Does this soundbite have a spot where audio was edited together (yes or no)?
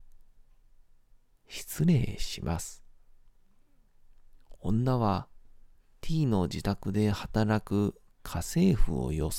yes